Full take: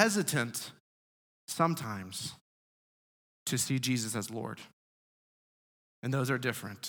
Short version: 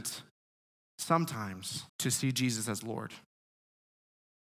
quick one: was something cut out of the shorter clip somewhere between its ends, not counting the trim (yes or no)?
yes